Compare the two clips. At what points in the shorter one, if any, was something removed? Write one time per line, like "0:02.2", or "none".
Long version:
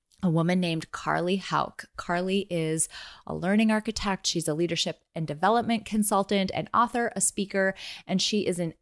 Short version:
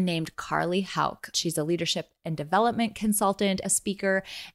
0:01.3
0:03.6

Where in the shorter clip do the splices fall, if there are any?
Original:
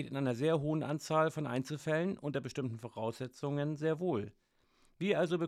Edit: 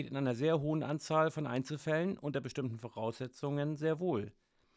none

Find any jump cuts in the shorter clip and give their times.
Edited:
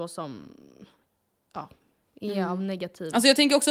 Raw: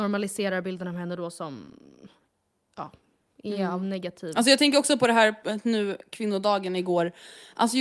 none

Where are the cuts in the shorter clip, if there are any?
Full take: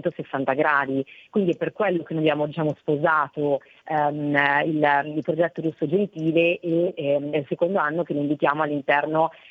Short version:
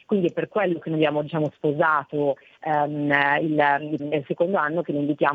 0:04.0

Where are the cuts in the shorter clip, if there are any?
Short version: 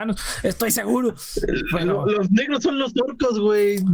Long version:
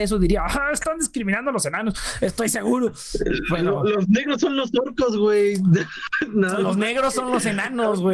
none

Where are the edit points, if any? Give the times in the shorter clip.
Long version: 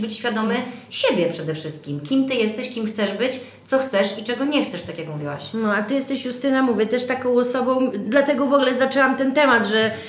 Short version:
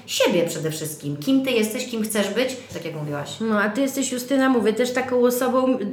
0:02.7

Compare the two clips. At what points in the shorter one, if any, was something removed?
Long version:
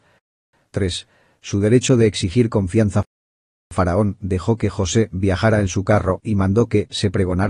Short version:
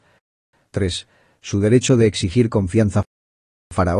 none

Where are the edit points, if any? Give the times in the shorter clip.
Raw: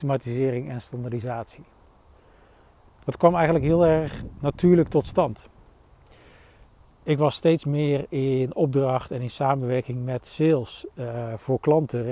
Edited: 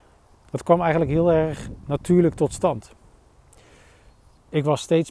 none

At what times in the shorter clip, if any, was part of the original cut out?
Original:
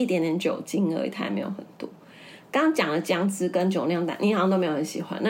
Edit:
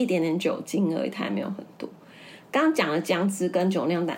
none

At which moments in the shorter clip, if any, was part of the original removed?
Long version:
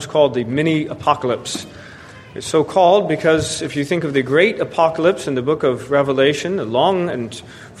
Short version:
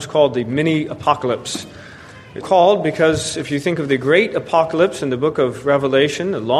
0:02.4

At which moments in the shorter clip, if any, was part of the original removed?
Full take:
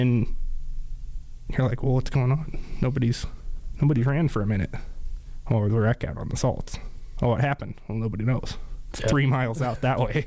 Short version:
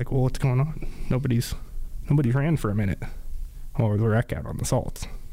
none

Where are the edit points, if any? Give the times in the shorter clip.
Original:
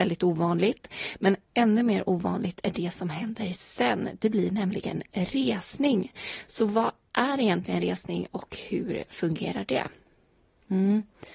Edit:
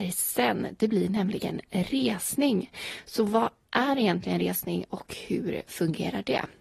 none

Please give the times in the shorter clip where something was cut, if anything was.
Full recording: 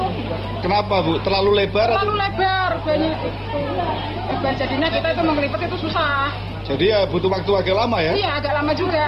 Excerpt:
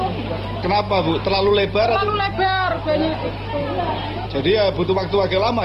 0:04.3

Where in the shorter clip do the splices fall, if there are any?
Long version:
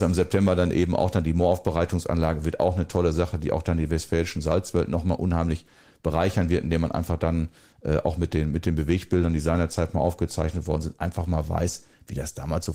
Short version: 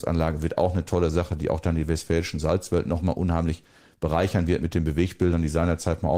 0:04.6

